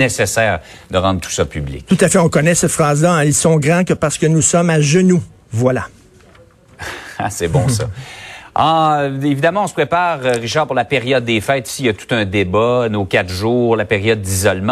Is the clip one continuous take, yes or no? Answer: yes